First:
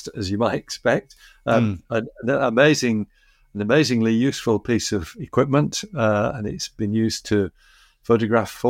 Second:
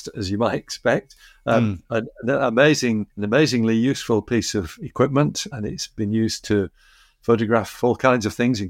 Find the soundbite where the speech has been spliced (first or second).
second